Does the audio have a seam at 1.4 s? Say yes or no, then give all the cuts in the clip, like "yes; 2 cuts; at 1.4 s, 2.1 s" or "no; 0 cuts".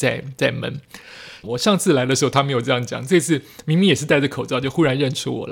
yes; 1 cut; at 1.4 s